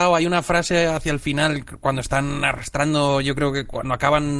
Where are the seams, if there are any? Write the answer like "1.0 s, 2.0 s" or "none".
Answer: none